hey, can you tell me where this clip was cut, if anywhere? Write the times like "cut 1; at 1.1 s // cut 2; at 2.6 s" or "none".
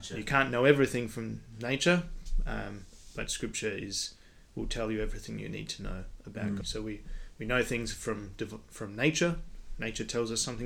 cut 1; at 6.6 s